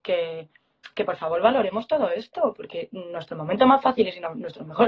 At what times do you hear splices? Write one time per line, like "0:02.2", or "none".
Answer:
none